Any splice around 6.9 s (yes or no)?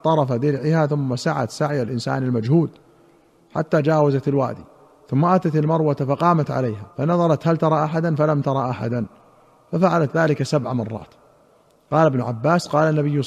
yes